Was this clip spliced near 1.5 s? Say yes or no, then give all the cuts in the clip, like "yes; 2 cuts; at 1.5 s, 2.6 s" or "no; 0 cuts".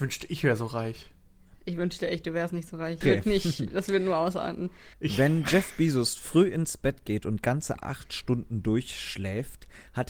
no; 2 cuts; at 3.0 s, 4.9 s